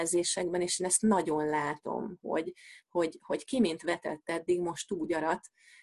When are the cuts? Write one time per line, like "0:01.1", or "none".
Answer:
none